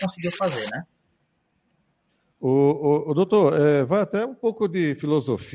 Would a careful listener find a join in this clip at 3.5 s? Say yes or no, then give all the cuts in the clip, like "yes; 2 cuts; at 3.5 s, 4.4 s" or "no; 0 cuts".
no; 0 cuts